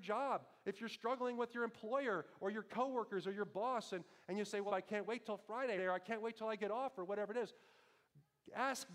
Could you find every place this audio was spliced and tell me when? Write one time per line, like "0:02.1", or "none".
0:04.7
0:05.8